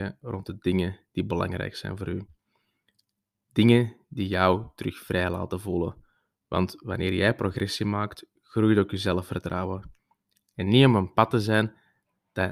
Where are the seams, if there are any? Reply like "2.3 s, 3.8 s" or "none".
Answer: 10.5 s